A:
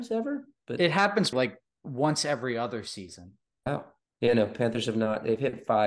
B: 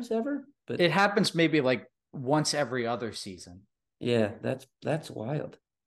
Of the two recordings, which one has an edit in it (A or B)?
A